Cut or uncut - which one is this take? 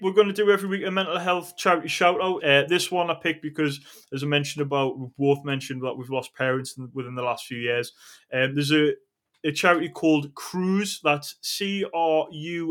cut